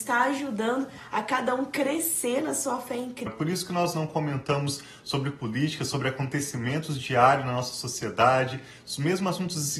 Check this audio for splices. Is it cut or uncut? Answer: cut